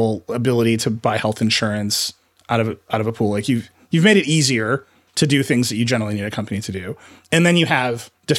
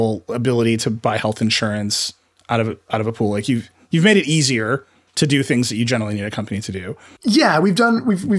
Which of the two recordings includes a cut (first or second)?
second